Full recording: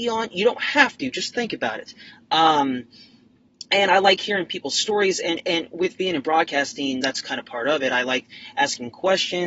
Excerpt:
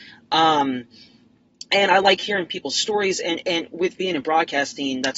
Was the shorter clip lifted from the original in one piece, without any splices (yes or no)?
yes